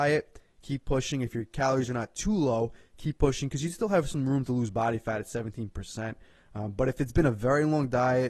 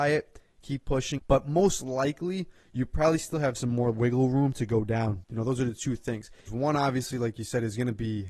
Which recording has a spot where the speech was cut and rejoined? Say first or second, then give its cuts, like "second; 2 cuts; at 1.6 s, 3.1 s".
second; 3 cuts; at 1.2 s, 5.2 s, 6.5 s